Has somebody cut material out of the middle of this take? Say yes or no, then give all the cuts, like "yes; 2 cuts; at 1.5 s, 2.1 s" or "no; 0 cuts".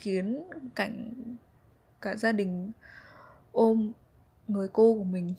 no; 0 cuts